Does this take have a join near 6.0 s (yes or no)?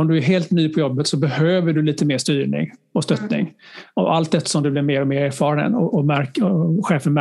no